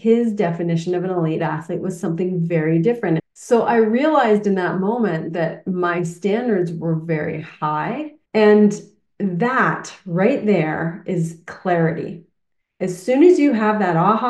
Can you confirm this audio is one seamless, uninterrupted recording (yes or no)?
no